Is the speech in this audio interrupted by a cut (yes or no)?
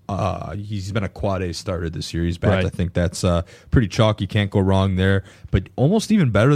yes